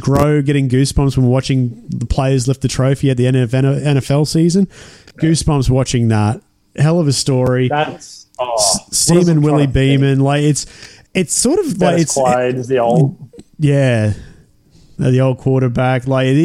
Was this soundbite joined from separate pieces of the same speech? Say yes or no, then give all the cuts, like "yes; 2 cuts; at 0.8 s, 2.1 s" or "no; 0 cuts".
yes; 1 cut; at 11.1 s